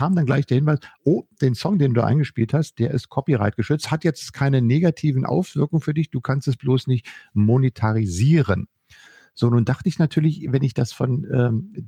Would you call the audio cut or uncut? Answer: uncut